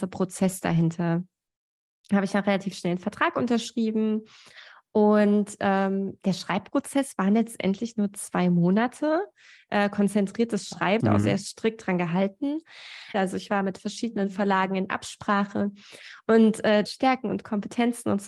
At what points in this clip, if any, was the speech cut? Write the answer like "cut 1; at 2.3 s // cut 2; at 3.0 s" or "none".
cut 1; at 11.0 s // cut 2; at 13.1 s // cut 3; at 16.9 s